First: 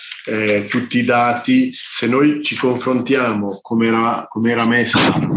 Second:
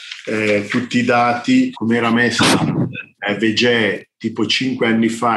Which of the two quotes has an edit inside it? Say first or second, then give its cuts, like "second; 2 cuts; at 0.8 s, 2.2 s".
second; 1 cut; at 1.7 s